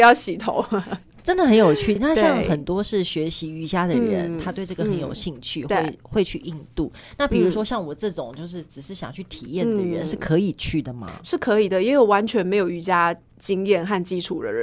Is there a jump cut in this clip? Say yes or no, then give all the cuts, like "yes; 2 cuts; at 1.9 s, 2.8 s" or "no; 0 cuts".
no; 0 cuts